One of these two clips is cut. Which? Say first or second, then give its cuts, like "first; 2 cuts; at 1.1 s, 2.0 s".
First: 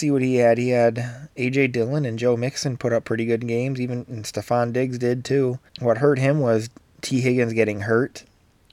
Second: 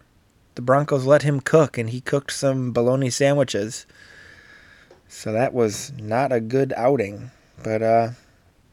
first; 1 cut; at 5.7 s